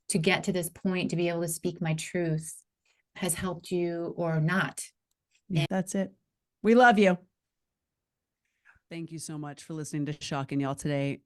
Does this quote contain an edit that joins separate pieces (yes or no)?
yes